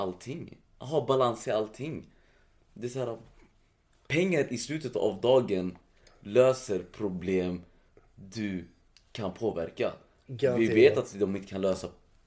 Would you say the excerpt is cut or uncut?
uncut